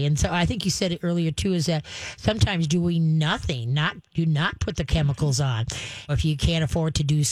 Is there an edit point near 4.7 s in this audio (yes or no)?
no